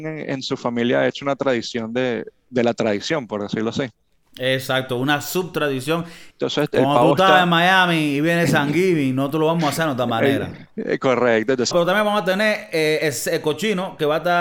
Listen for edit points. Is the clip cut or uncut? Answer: cut